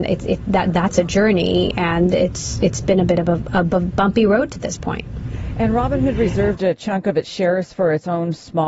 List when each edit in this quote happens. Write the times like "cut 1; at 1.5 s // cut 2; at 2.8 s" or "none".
none